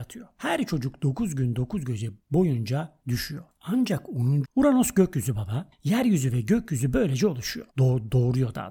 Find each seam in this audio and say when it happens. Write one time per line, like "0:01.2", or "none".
0:04.4
0:07.7